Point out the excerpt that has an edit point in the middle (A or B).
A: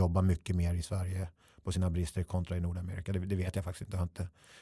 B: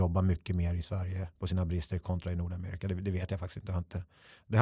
B